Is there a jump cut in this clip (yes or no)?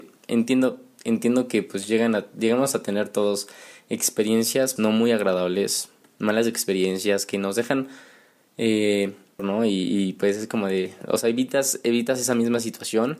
yes